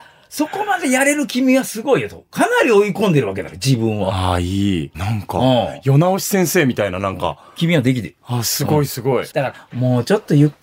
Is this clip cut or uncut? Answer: cut